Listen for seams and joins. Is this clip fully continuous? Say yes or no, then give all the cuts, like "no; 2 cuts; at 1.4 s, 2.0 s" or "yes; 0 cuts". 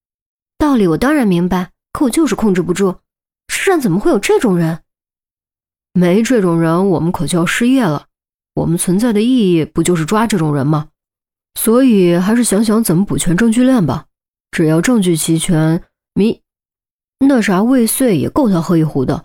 yes; 0 cuts